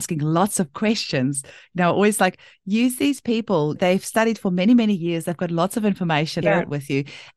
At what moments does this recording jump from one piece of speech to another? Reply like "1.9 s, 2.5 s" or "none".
6.4 s